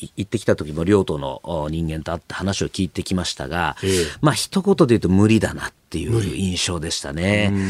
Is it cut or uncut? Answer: uncut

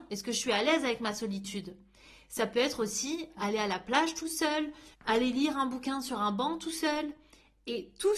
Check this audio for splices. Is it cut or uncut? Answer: cut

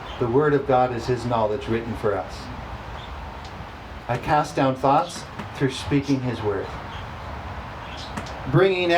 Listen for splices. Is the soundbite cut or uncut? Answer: uncut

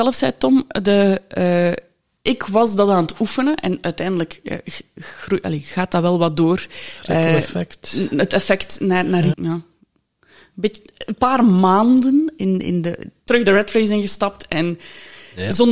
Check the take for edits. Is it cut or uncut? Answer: cut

